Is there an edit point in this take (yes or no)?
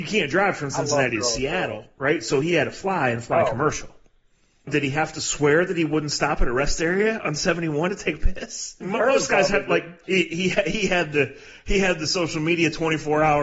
yes